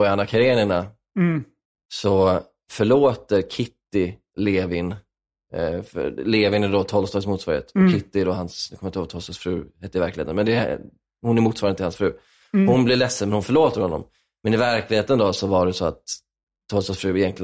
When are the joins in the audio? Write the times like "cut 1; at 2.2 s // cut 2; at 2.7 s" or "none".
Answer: none